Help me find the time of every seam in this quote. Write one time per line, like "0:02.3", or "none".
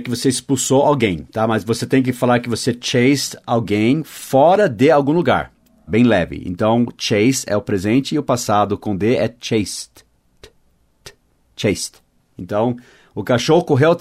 0:05.9